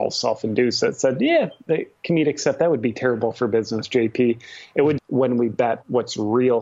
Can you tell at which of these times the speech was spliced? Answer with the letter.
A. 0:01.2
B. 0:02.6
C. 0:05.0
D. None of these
C